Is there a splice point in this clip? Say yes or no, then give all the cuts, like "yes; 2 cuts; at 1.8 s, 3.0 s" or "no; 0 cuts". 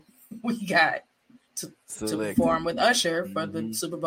yes; 1 cut; at 1.4 s